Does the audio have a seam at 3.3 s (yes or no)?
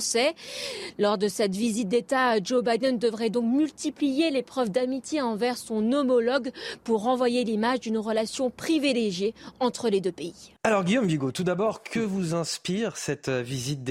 no